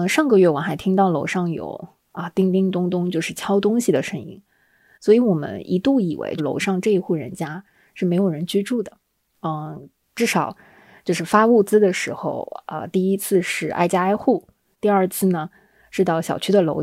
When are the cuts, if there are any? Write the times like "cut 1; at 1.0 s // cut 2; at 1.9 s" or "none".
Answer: cut 1; at 6.4 s // cut 2; at 9.3 s